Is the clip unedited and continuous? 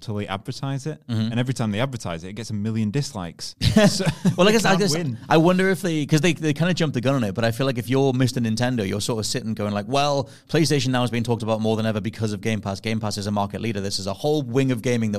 yes; 0 cuts

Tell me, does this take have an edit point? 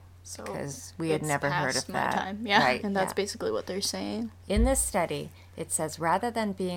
yes; 2 cuts; at 2.8 s, 4.5 s

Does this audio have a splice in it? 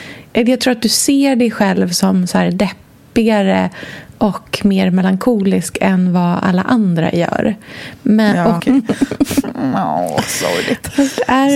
yes; 1 cut; at 8.6 s

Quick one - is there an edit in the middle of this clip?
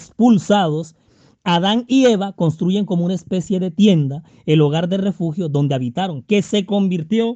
no; 0 cuts

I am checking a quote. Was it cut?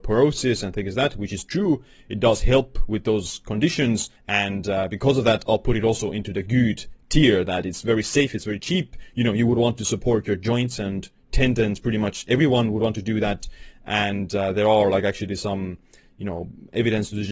yes; 1 cut; at 4.2 s

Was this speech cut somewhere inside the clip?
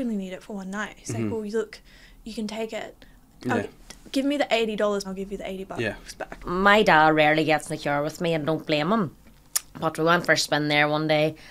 yes; 2 cuts; at 5.0 s, 6.4 s

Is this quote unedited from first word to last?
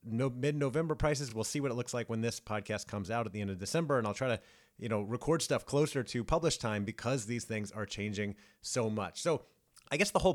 yes; 0 cuts

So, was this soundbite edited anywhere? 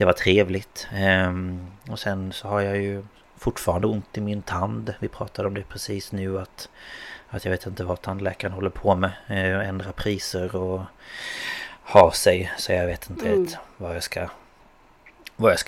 no; 0 cuts

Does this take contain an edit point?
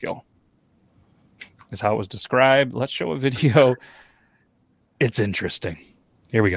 no; 0 cuts

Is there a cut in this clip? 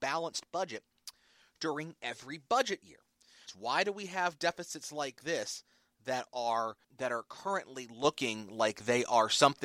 yes; 2 cuts; at 3.5 s, 6.8 s

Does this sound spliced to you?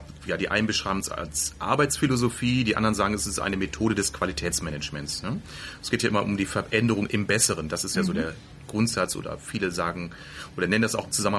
yes; 1 cut; at 7.1 s

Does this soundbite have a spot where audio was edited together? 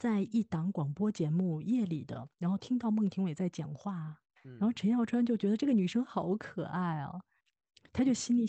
yes; 1 cut; at 4.4 s

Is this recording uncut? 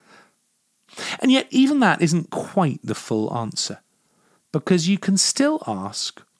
yes; 0 cuts

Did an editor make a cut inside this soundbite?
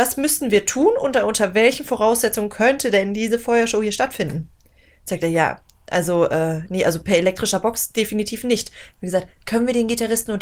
no; 0 cuts

